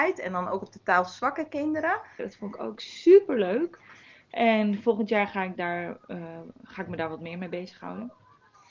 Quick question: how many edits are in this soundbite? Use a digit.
1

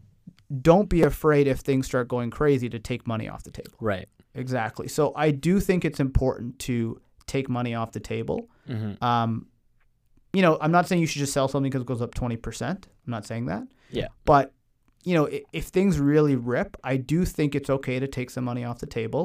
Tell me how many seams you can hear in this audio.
1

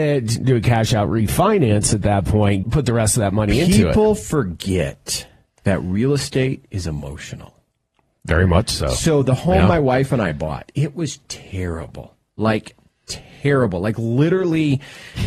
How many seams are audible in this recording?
1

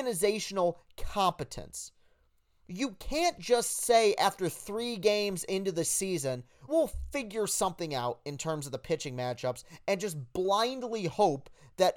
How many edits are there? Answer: 1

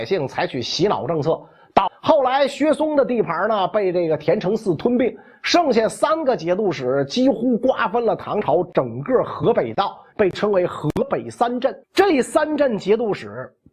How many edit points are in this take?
3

